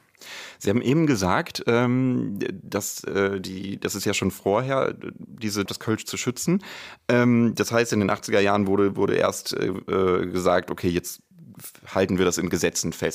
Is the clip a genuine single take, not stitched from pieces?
no; 1 cut; at 5.7 s

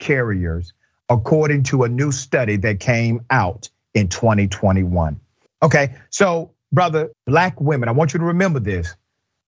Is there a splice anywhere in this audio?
yes; 2 cuts; at 5.5 s, 7.1 s

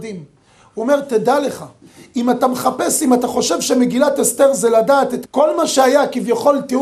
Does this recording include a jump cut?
yes; 1 cut; at 5.3 s

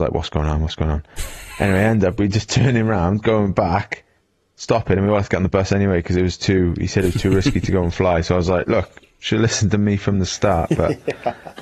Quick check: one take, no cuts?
yes; 0 cuts

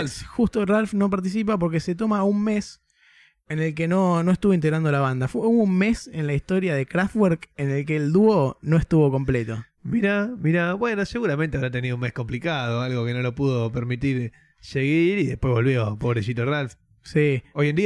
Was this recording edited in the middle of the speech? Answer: no; 0 cuts

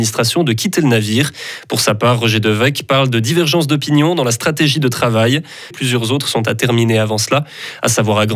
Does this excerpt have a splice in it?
yes; 1 cut; at 5.7 s

